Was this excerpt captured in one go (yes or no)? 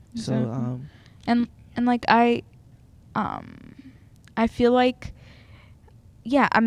yes